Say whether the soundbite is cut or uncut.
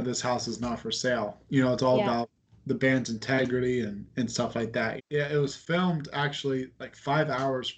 cut